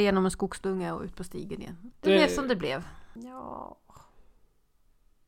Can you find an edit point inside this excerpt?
yes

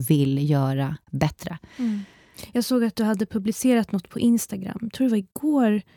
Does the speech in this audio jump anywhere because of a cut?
no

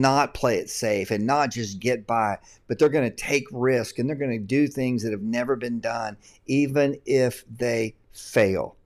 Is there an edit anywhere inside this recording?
no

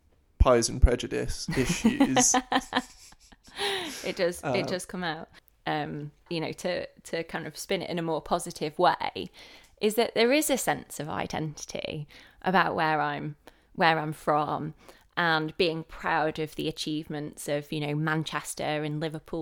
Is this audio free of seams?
yes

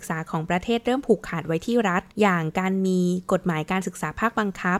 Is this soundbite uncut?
no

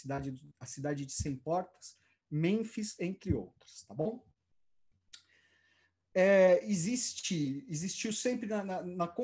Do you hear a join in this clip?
no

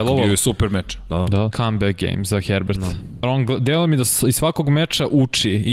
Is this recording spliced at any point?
yes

